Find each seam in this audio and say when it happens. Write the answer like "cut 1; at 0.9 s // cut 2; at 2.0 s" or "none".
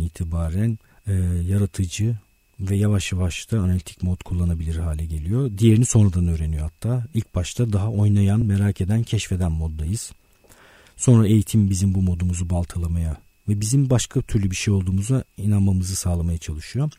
none